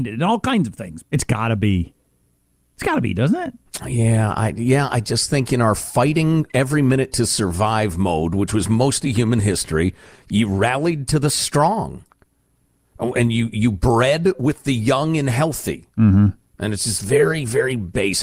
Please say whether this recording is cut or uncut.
cut